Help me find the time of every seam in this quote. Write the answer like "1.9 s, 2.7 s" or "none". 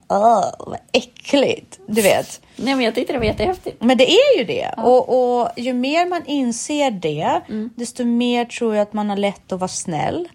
none